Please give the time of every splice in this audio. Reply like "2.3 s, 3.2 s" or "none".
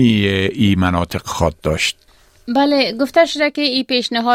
none